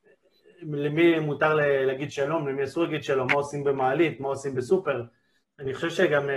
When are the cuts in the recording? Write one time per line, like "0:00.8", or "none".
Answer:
0:05.4